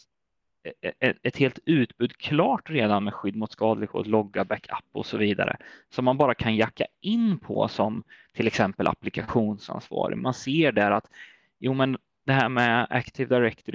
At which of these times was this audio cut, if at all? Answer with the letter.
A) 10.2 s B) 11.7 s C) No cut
C